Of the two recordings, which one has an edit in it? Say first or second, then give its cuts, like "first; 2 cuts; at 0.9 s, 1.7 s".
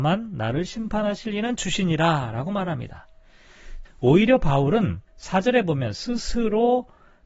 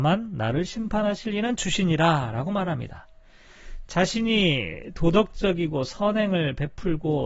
first; 2 cuts; at 3.9 s, 5.1 s